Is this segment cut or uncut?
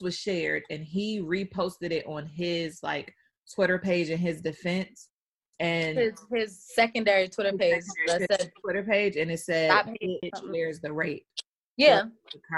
cut